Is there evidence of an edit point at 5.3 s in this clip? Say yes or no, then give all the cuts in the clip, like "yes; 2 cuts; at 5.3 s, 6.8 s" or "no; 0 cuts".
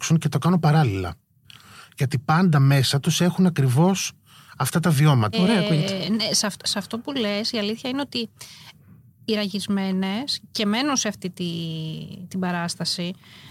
yes; 1 cut; at 5.3 s